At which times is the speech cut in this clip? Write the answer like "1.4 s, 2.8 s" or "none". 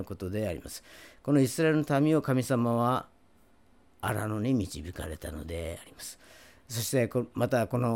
none